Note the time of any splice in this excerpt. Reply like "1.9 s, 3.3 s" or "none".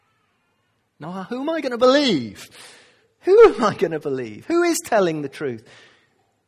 1.0 s